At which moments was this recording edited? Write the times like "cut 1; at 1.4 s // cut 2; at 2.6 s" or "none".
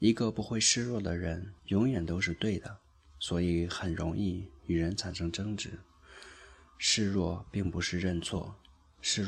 cut 1; at 1.6 s